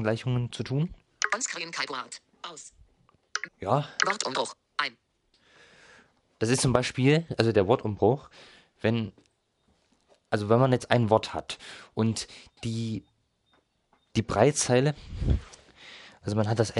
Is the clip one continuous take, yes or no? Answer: no